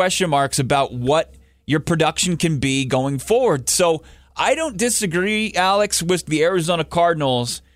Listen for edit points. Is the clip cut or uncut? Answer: uncut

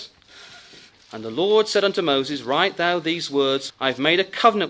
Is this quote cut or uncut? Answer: cut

